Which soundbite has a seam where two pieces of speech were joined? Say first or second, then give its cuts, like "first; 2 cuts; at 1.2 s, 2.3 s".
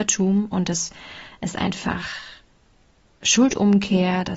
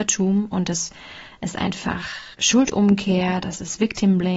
second; 1 cut; at 2.3 s